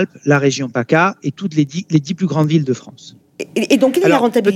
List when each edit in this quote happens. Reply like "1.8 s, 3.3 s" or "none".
3.2 s